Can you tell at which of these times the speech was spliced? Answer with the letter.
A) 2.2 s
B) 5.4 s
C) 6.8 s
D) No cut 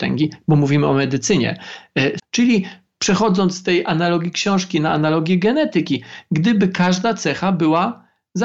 A